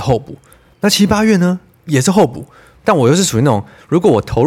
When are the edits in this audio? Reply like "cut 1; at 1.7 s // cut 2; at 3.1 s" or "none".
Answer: cut 1; at 2.7 s